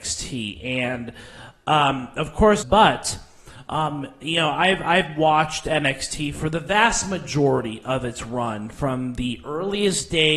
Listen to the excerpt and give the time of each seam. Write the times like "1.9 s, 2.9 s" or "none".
2.6 s